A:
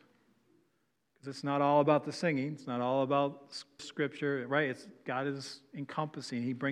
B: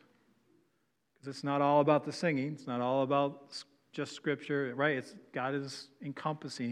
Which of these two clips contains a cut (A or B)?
A